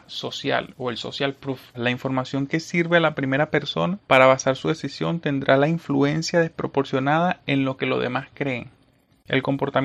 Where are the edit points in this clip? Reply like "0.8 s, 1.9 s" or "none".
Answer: 1.7 s, 4.0 s